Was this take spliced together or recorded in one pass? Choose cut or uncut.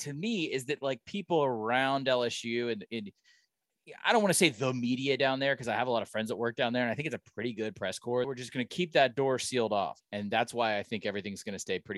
cut